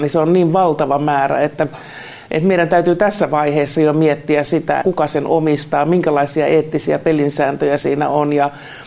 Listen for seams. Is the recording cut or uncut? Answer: cut